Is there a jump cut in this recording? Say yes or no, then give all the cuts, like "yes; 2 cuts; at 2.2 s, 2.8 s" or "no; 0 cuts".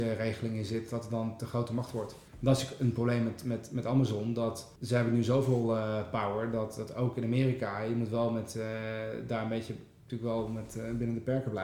yes; 2 cuts; at 2.3 s, 4.8 s